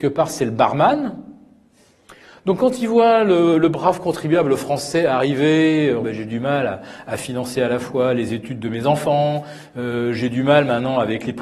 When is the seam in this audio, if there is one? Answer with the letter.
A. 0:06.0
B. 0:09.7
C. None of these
A